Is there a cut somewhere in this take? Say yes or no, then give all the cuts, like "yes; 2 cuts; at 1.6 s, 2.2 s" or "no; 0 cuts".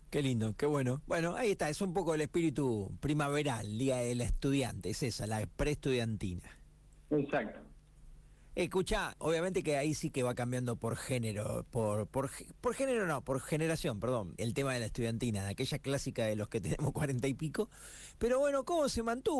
yes; 2 cuts; at 9.2 s, 14.4 s